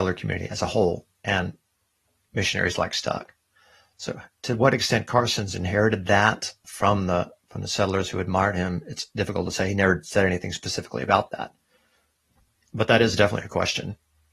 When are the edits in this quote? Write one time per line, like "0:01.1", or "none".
0:06.6